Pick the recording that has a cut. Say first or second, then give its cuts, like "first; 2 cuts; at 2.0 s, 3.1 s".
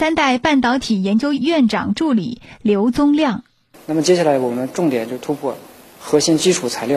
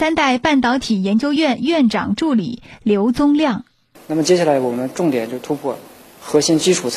first; 1 cut; at 1.4 s